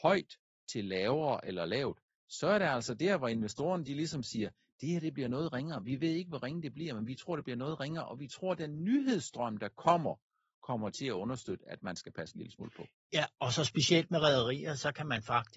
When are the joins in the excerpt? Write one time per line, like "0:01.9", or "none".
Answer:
none